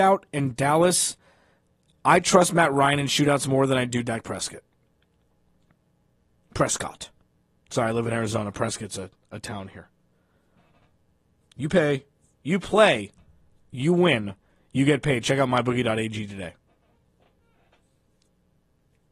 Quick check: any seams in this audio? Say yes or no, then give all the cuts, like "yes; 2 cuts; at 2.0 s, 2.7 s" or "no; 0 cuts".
no; 0 cuts